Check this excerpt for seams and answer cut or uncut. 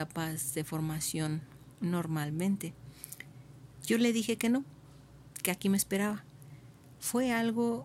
uncut